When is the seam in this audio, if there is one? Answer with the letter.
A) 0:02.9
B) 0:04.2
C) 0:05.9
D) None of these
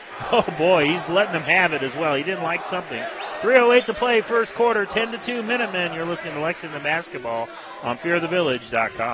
D